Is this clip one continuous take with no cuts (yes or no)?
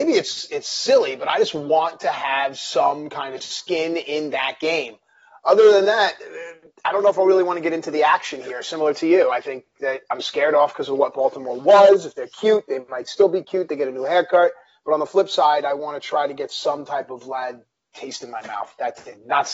yes